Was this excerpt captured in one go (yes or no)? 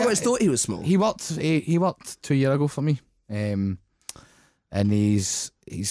yes